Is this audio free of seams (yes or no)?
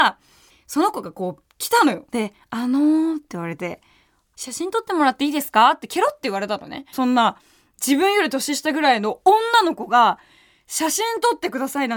no